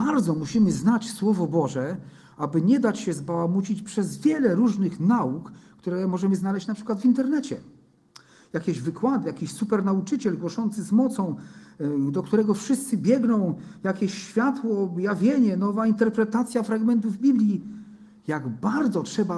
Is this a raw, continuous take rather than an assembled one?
yes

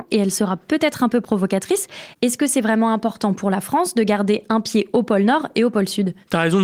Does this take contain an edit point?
no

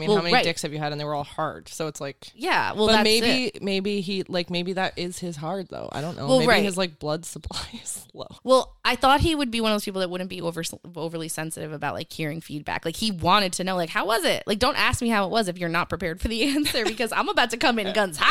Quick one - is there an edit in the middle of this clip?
yes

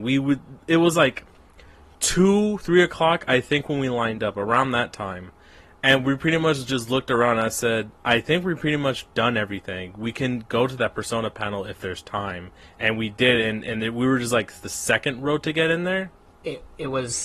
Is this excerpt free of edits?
yes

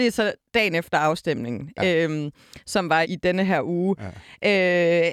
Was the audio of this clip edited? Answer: yes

